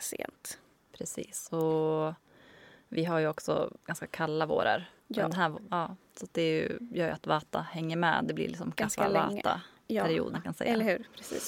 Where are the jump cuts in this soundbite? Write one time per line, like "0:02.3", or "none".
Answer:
0:05.0
0:10.3